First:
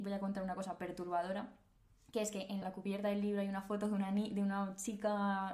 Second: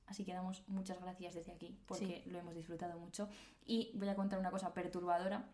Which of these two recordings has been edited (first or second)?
first